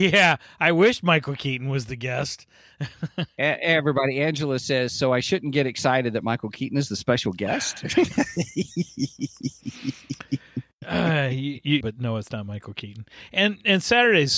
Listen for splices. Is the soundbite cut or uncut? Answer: cut